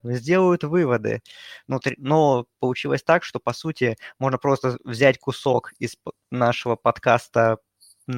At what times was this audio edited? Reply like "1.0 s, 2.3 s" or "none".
none